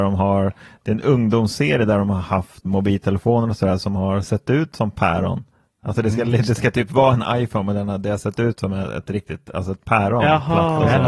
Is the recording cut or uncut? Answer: cut